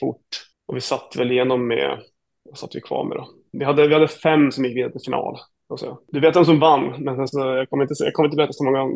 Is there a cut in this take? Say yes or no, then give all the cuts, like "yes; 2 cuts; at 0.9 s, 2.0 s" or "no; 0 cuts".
no; 0 cuts